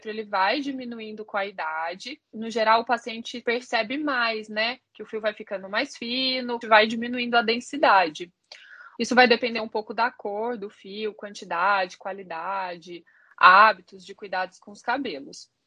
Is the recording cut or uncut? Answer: cut